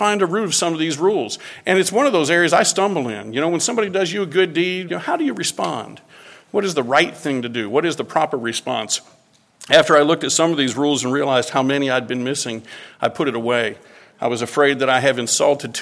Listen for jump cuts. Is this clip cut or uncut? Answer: cut